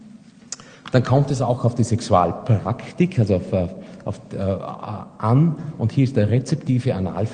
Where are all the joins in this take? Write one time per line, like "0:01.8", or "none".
none